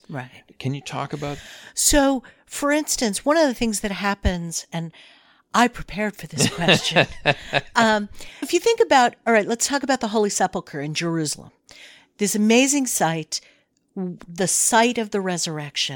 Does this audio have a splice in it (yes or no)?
yes